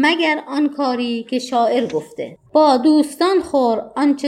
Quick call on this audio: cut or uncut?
cut